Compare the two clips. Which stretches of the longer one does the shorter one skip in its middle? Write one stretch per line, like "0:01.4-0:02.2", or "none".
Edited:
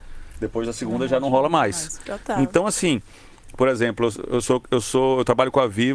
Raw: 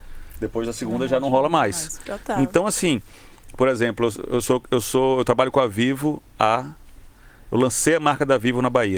none